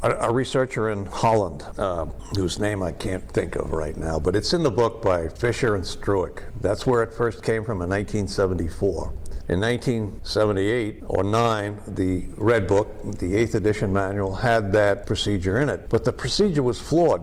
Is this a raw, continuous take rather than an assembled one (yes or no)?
yes